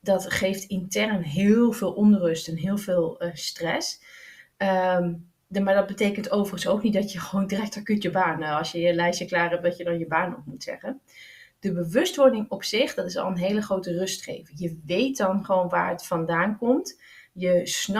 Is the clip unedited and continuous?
yes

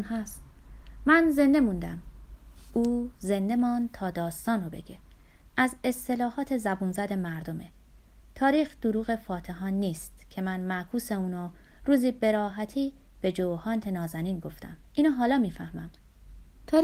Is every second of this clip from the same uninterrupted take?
no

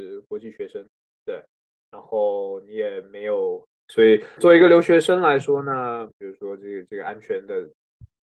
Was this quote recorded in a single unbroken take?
no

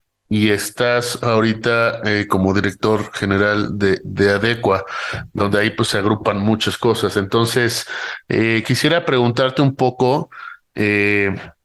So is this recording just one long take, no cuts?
no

